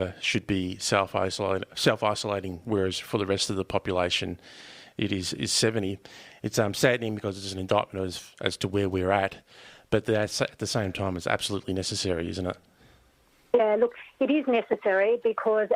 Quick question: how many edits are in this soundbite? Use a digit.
1